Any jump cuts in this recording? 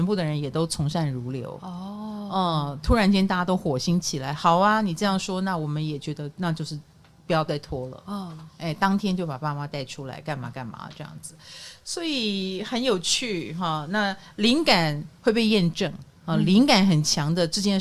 no; 0 cuts

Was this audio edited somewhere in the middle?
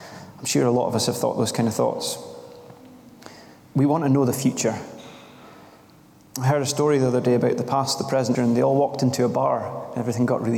yes; 1 cut; at 8.3 s

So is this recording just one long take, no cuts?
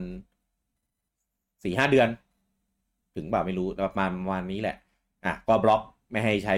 yes; 0 cuts

